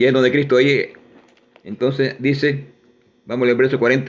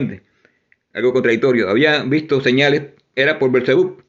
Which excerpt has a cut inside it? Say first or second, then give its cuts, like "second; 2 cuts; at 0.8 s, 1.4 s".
second; 1 cut; at 3.2 s